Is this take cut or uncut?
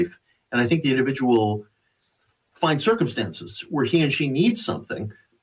uncut